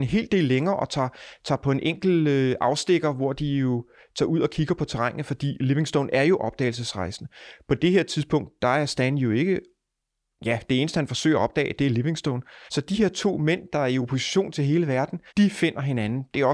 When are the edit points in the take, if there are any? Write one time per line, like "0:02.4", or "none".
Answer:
0:12.7
0:15.3